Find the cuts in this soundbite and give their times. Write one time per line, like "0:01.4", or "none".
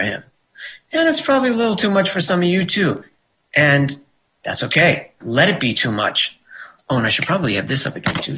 0:05.2
0:06.8